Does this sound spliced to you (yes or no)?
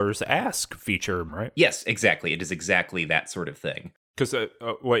yes